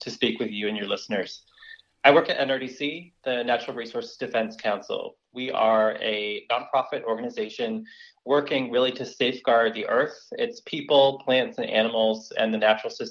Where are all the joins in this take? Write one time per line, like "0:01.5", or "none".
none